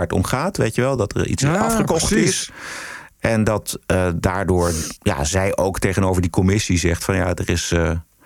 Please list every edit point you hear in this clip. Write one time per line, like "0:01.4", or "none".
none